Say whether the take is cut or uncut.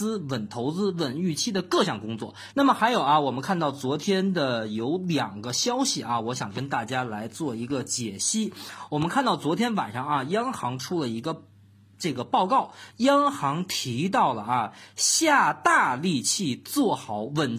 cut